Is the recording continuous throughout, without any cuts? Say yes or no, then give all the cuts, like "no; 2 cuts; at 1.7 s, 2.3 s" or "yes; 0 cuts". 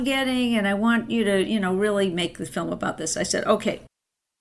yes; 0 cuts